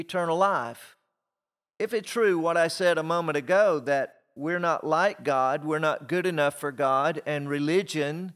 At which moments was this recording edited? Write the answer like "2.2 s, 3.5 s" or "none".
2.0 s

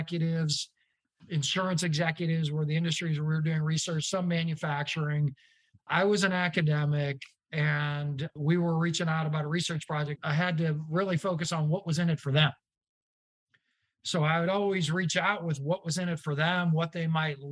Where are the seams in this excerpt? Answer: 10.2 s

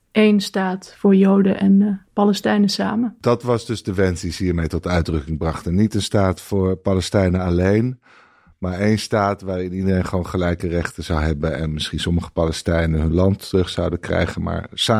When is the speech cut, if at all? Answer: none

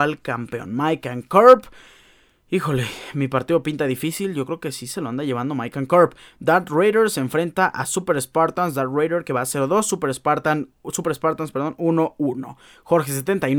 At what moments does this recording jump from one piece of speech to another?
none

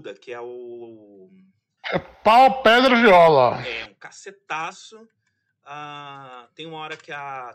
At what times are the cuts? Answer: 1.8 s

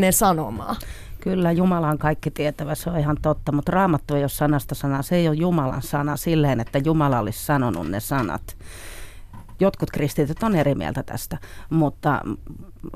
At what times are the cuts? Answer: none

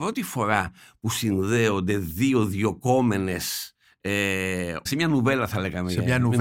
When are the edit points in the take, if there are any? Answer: 4.9 s

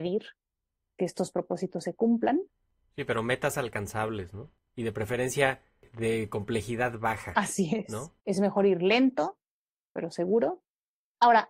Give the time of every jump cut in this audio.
8.2 s

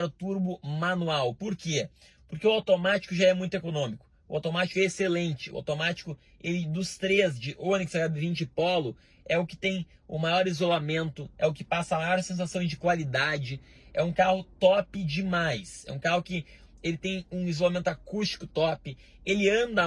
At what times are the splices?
none

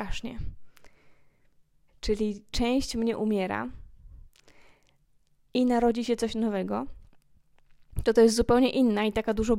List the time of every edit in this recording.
1.9 s

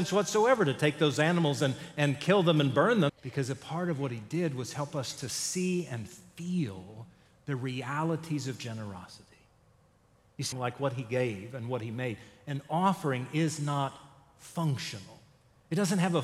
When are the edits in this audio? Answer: 3.1 s, 10.5 s

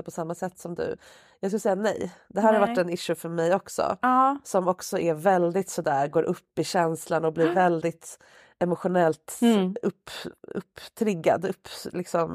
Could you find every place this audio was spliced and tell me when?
none

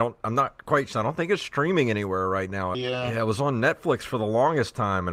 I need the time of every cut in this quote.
0.9 s, 2.7 s

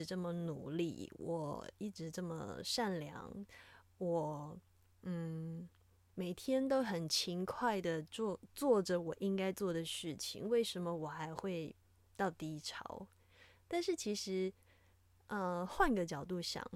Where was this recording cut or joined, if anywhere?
none

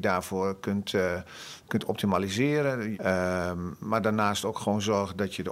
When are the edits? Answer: 2.9 s

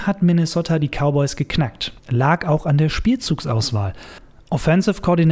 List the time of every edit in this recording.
2.0 s

